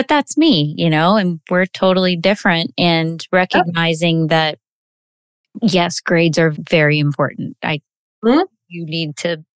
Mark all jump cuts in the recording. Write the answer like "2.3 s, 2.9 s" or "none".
6.5 s